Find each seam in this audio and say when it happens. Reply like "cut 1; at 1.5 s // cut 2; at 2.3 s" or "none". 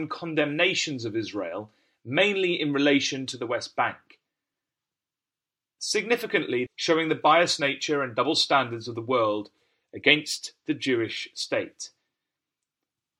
cut 1; at 6.7 s